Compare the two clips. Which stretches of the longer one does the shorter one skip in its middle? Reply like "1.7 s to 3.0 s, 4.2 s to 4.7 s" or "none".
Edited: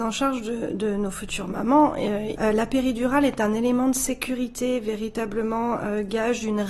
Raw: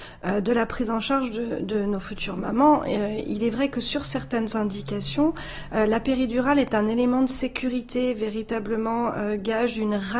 3.2 s to 5.7 s